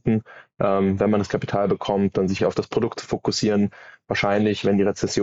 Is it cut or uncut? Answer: cut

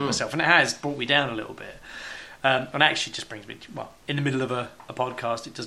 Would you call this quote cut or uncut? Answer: uncut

